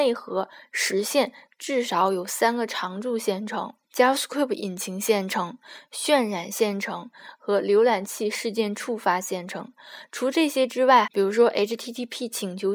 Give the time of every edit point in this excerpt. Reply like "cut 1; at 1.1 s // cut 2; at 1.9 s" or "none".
cut 1; at 3.8 s // cut 2; at 11.0 s